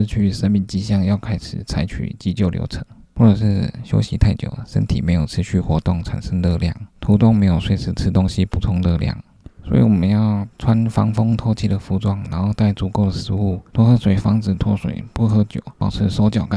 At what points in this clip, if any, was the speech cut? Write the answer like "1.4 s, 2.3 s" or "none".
3.0 s, 13.7 s